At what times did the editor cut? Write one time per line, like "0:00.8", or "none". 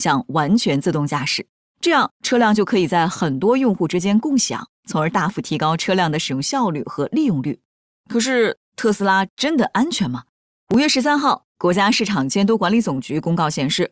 0:07.9